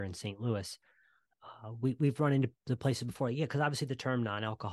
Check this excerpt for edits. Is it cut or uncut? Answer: uncut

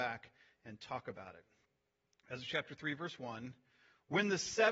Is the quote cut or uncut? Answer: uncut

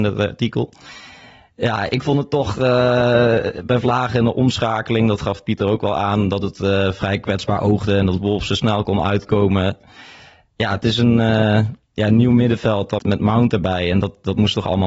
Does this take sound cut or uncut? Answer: cut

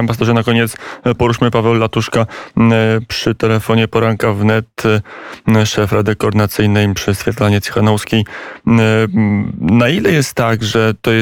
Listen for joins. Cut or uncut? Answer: uncut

